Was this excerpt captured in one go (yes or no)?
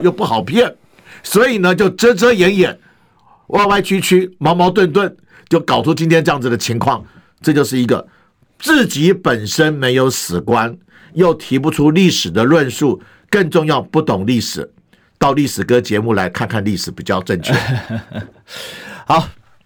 yes